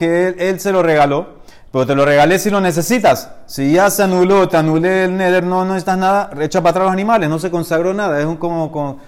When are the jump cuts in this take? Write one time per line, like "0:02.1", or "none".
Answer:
none